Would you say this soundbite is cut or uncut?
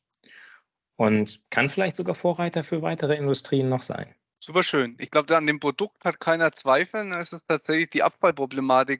uncut